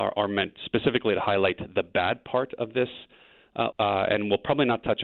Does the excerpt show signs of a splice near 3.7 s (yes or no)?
yes